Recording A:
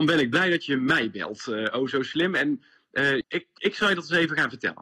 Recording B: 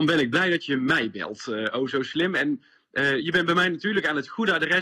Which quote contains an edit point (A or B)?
A